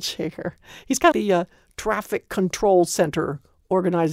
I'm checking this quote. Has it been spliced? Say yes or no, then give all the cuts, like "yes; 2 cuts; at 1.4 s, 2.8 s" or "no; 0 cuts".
yes; 1 cut; at 1.1 s